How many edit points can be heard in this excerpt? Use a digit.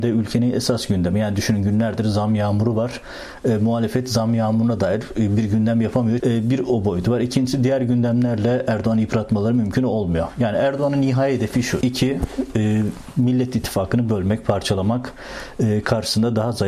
2